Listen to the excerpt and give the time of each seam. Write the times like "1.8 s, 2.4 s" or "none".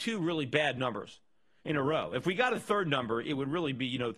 none